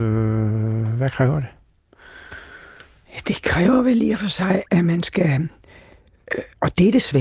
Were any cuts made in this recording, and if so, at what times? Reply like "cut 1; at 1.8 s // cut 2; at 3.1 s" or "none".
none